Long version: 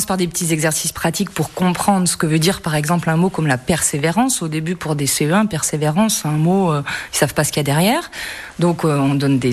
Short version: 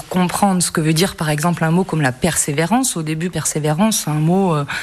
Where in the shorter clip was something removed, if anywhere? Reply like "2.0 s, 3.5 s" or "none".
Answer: 3.3 s